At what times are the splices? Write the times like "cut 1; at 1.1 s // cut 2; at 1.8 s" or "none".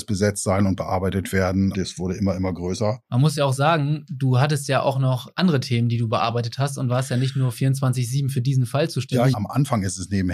cut 1; at 1.7 s // cut 2; at 9.3 s